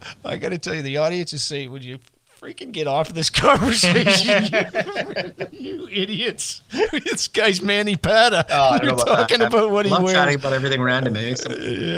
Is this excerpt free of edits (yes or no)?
yes